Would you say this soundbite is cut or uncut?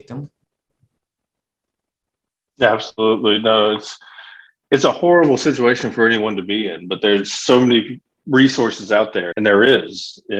cut